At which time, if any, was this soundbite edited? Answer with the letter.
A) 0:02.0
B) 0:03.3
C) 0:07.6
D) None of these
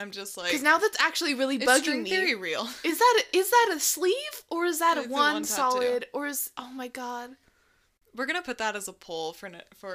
D